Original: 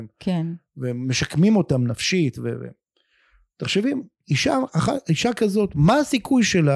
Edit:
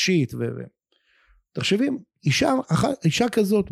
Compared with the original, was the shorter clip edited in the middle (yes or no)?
no